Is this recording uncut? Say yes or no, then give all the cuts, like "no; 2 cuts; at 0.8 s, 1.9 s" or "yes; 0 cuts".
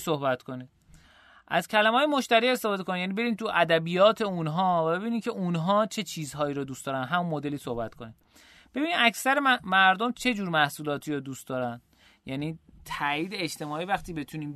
yes; 0 cuts